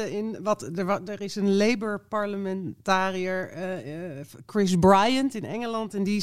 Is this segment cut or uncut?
uncut